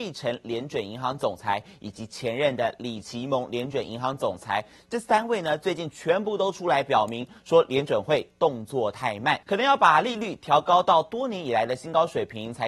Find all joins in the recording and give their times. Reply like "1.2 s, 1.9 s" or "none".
9.4 s